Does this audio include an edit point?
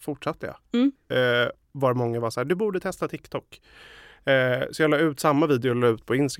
yes; 1 cut; at 1.0 s

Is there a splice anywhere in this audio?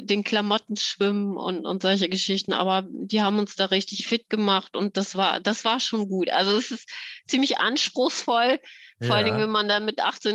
no; 0 cuts

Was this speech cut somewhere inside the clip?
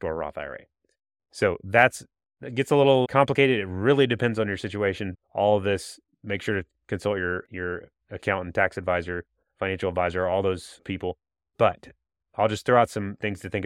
yes; 2 cuts; at 3.0 s, 5.1 s

